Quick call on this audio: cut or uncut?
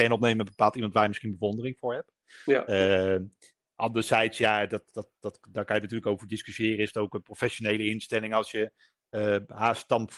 uncut